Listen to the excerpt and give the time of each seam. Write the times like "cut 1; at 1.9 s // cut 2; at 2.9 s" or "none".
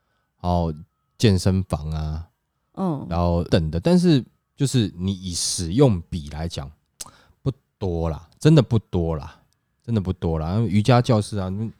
cut 1; at 3.5 s